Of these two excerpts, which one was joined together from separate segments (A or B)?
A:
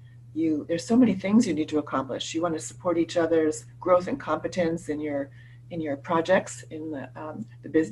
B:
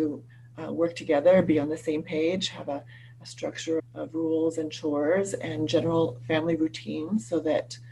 B